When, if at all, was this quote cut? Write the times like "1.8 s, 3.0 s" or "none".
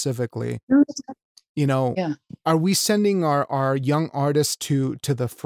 none